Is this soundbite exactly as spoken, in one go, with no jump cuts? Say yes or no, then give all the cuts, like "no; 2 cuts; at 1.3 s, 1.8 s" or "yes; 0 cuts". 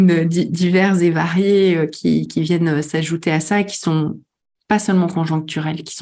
yes; 0 cuts